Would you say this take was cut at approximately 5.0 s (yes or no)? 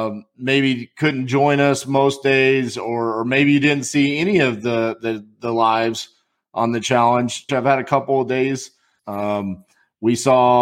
no